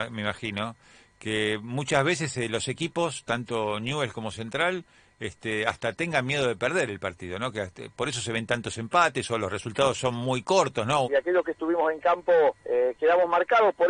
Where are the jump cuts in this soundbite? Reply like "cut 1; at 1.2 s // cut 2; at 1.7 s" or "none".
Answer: cut 1; at 11.0 s // cut 2; at 12.6 s

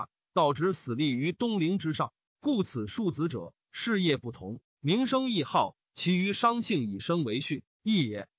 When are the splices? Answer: cut 1; at 2.3 s

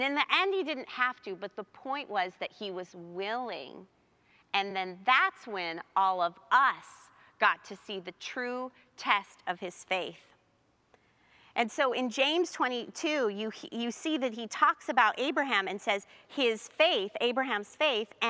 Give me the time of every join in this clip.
none

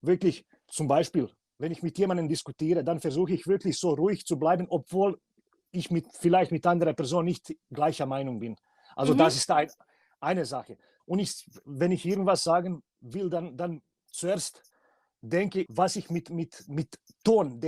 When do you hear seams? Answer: cut 1; at 11.0 s // cut 2; at 15.7 s

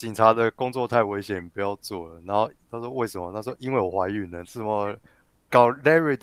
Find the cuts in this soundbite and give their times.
cut 1; at 4.4 s

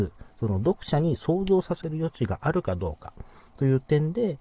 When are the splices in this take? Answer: none

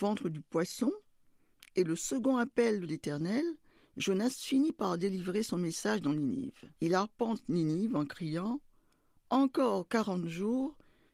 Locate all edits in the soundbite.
cut 1; at 6.8 s

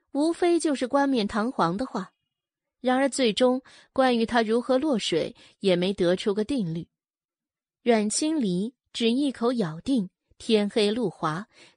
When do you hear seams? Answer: none

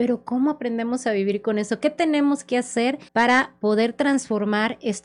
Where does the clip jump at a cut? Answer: cut 1; at 3.1 s

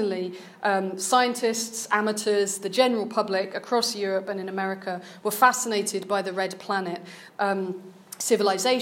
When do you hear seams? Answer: cut 1; at 7.4 s

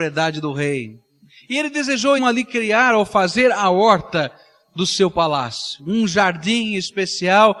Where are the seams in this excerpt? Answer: cut 1; at 2.2 s

